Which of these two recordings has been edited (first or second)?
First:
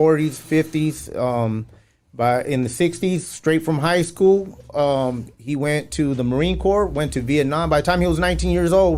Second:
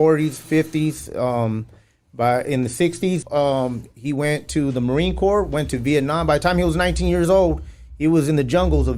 second